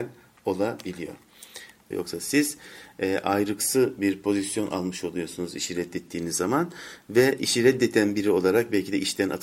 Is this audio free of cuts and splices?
no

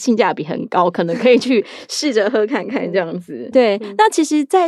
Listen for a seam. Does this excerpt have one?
yes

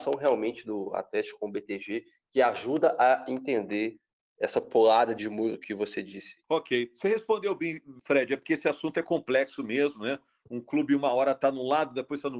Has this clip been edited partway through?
yes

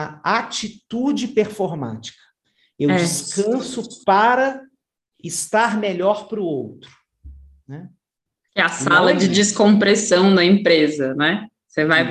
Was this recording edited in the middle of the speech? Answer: no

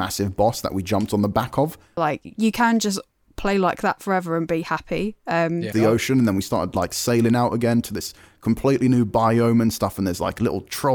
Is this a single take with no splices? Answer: no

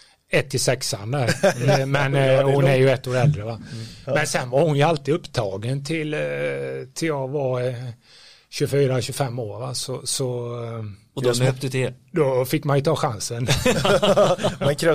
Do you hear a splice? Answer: no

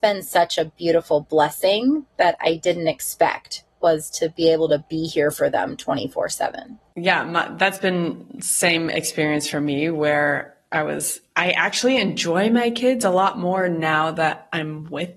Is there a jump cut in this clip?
no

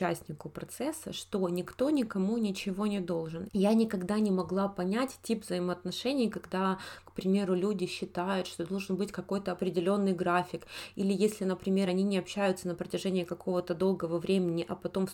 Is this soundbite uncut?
yes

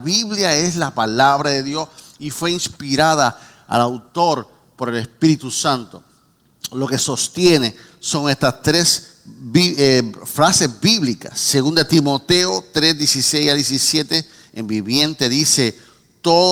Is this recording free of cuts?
yes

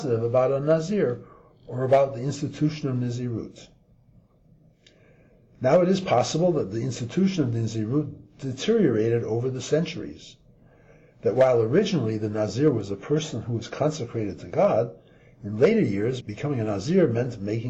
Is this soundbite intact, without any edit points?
no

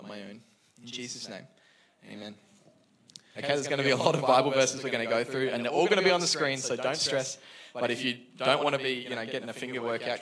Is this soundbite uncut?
no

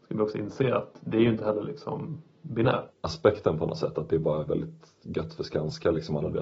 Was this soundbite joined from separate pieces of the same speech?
yes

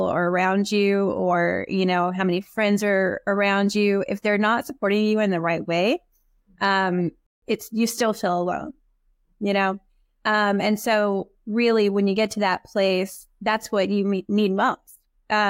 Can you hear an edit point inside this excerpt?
no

